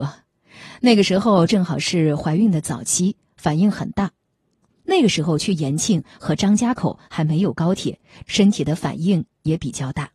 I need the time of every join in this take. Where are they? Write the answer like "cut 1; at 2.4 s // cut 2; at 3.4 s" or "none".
cut 1; at 4.7 s // cut 2; at 8.2 s

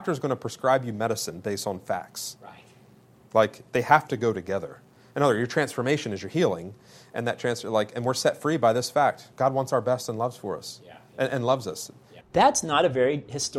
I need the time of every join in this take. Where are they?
cut 1; at 9.3 s // cut 2; at 12.2 s

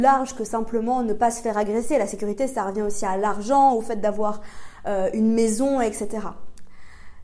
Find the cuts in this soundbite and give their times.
none

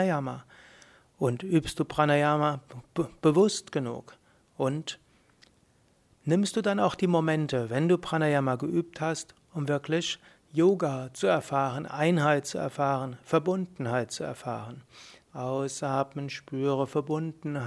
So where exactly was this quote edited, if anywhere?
cut 1; at 15.2 s

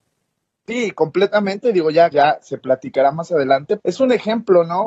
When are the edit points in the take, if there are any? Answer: cut 1; at 2.1 s // cut 2; at 3.8 s

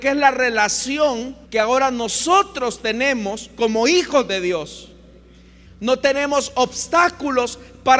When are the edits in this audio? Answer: cut 1; at 1.4 s // cut 2; at 5.7 s

